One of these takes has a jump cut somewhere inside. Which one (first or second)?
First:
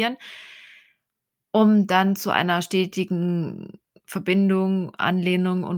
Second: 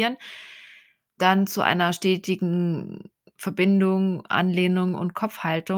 second